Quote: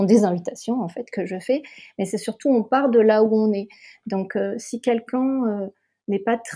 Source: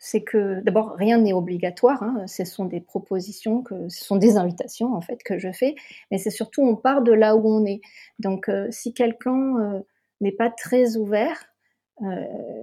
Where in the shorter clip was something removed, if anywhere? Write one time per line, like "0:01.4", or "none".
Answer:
none

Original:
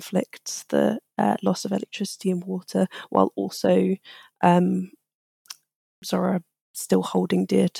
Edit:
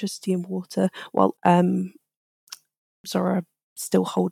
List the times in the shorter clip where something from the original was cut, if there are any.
0:01.4

